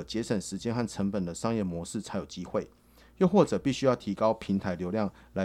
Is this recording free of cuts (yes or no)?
yes